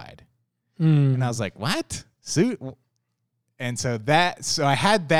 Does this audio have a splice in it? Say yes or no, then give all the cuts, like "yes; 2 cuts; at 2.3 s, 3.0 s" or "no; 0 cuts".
no; 0 cuts